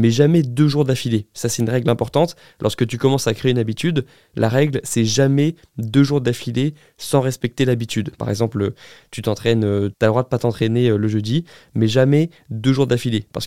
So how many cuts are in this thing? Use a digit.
2